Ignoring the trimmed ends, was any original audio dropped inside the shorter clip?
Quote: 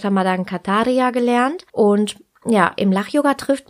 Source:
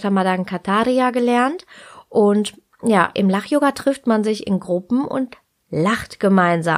yes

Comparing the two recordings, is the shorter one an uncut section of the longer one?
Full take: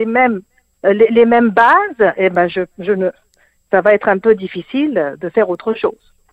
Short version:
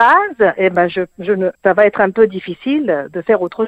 no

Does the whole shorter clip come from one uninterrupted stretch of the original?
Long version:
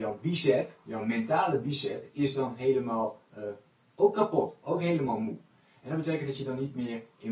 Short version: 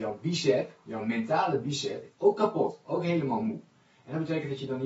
no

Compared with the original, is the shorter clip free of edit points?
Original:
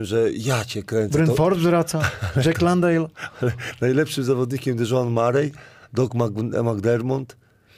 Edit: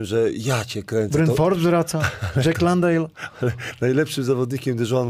yes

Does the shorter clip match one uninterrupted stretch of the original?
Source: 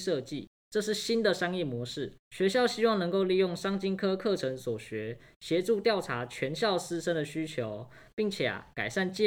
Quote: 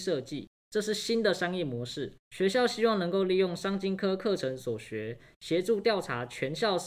yes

